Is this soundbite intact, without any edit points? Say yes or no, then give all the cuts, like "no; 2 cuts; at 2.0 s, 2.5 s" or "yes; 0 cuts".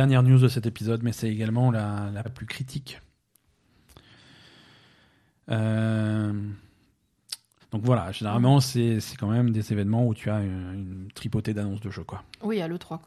no; 2 cuts; at 2.2 s, 7.6 s